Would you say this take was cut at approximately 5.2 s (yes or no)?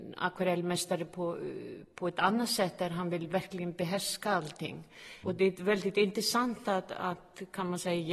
yes